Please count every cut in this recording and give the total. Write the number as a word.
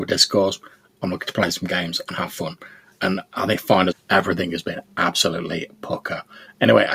one